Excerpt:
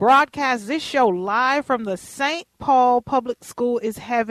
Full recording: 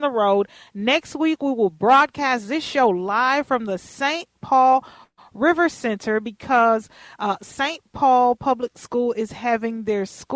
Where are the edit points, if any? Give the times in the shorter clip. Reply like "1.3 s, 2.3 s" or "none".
2.5 s